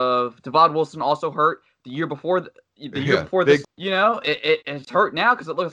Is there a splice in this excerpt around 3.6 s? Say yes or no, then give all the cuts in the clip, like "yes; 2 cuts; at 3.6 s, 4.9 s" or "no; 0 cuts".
yes; 1 cut; at 3.6 s